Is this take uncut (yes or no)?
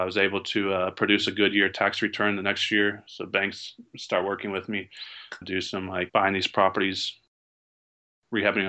no